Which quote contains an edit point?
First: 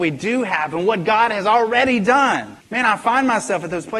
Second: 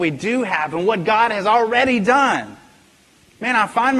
first; 1 cut; at 2.6 s

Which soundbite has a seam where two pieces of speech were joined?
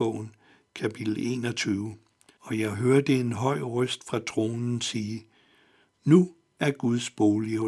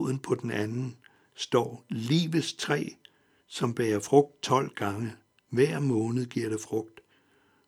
first; 1 cut; at 2.4 s

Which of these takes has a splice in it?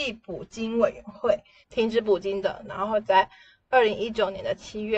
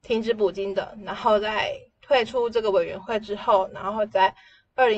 first; 2 cuts; at 1.6 s, 2.6 s

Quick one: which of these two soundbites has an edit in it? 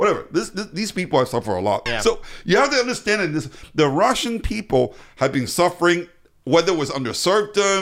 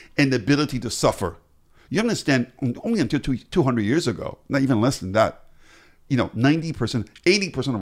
first; 1 cut; at 1.9 s

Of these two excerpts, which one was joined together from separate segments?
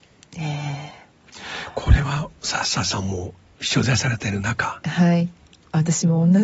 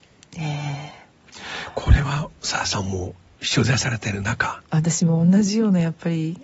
second; 2 cuts; at 2.6 s, 4.6 s

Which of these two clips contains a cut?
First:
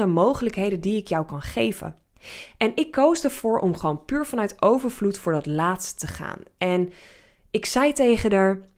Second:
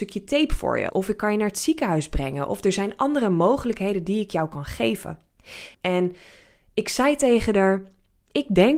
second; 2 cuts; at 0.9 s, 5.7 s

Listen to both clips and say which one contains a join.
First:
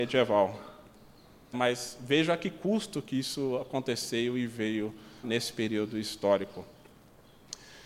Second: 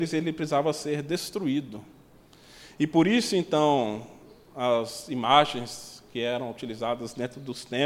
first; 2 cuts; at 1.5 s, 5.2 s

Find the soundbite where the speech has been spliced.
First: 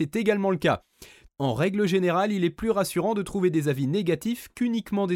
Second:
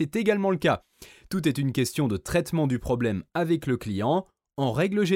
first; 1 cut; at 1.3 s

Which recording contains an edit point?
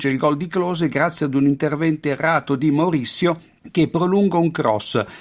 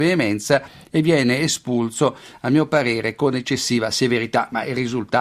first; 1 cut; at 3.6 s

